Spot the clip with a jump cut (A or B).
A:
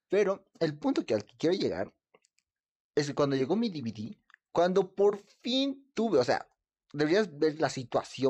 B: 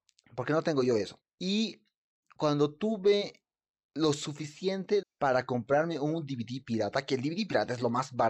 B